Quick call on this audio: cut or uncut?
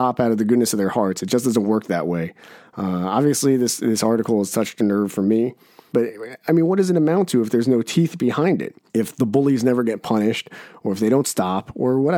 cut